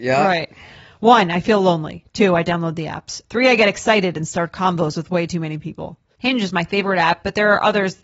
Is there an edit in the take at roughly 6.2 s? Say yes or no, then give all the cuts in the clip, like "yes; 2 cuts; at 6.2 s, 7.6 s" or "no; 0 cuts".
yes; 1 cut; at 6.2 s